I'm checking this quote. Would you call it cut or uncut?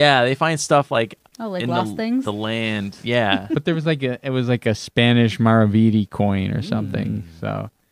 uncut